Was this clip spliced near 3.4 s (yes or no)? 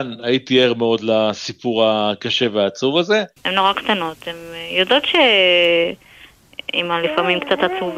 yes